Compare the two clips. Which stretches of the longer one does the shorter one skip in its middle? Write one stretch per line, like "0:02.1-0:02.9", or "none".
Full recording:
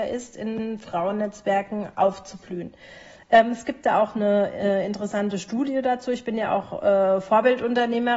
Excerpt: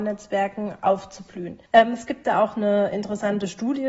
0:02.8-0:03.2
0:04.5-0:04.8